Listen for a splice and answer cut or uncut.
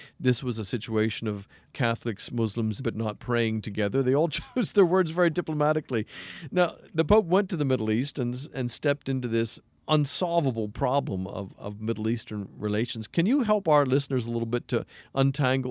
cut